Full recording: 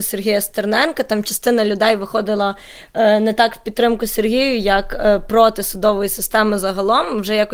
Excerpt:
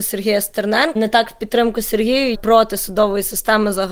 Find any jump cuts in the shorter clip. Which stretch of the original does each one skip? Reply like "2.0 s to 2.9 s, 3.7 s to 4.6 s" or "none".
1.0 s to 3.2 s, 4.6 s to 5.2 s

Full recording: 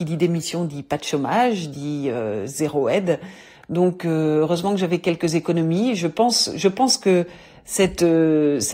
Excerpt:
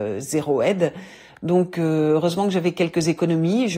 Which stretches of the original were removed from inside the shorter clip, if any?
none

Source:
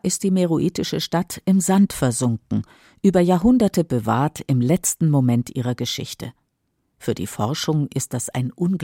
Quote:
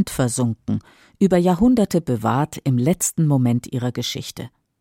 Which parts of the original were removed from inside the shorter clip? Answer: none

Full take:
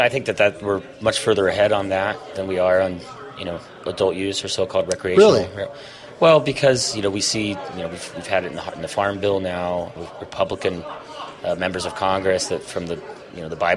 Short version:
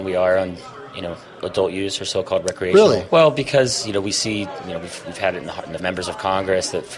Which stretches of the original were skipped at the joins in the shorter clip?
5.5 s to 6.2 s, 8.9 s to 11.6 s

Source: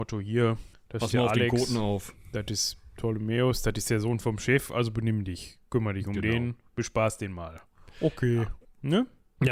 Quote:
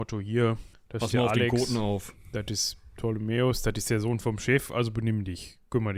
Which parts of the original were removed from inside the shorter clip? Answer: none

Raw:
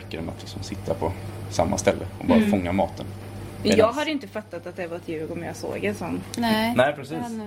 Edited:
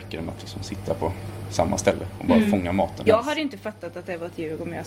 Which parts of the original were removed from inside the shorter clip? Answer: 3.1 s to 3.8 s

